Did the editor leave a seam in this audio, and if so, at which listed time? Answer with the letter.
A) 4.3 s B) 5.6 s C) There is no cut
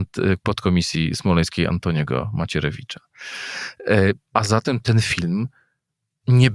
A